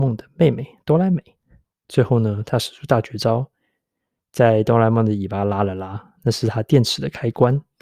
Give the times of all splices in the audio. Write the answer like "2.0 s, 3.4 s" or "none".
1.7 s

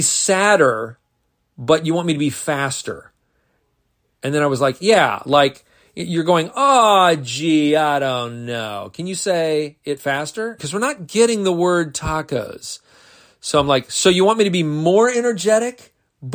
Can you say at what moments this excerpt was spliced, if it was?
10.6 s

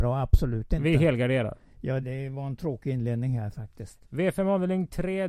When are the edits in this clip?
2.0 s

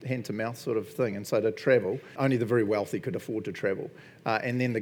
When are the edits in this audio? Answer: 2.1 s

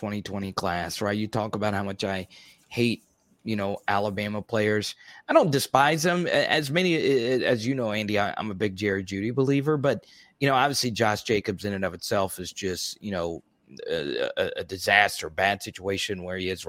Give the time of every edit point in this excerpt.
none

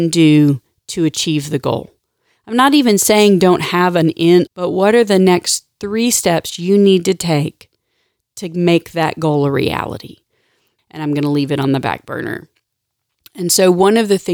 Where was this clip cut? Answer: 4.5 s, 10.8 s

